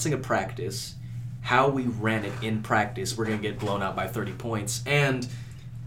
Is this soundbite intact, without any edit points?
no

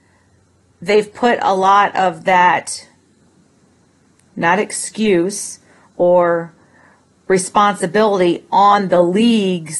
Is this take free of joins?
yes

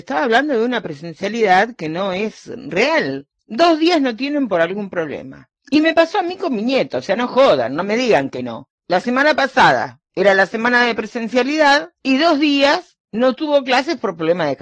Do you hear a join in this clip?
yes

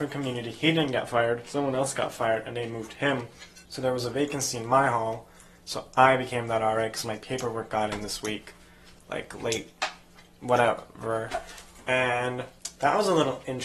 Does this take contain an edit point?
yes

